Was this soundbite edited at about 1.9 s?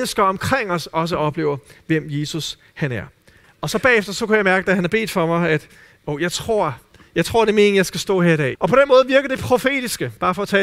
no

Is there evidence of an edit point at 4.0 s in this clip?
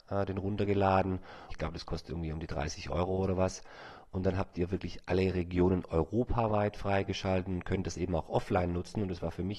no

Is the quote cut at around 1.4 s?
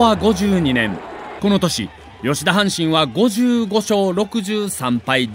yes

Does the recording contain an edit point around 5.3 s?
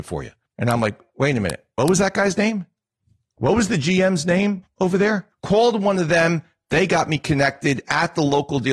yes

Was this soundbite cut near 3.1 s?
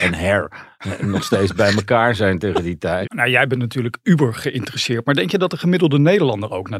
yes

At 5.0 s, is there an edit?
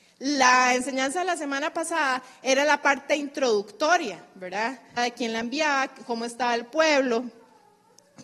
yes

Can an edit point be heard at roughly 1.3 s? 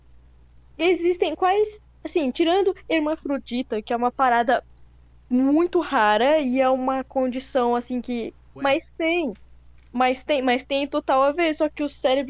yes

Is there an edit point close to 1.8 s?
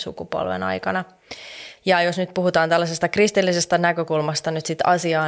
yes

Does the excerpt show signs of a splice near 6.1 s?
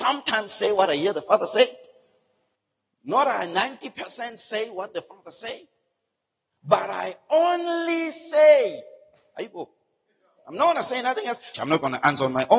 no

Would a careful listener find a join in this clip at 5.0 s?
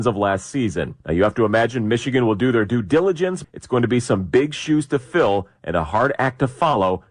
no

